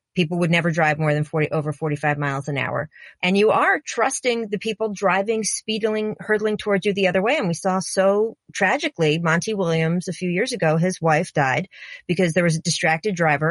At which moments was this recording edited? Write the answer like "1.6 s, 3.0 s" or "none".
3.2 s